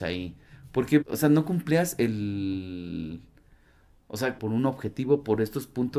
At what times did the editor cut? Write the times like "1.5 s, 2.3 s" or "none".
1.0 s, 4.4 s

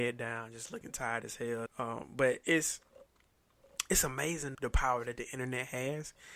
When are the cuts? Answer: 1.7 s, 4.5 s

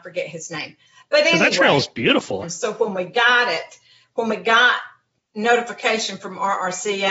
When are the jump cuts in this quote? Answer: 2.4 s

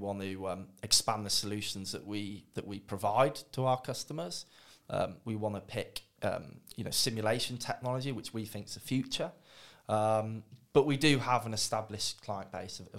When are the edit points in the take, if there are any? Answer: none

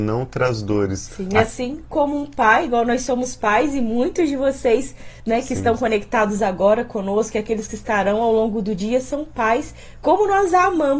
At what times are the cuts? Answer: none

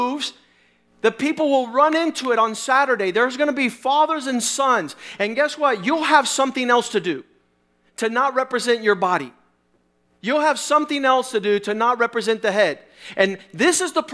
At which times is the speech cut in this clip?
none

